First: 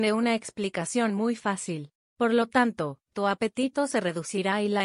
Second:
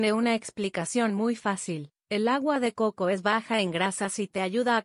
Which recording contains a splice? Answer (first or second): first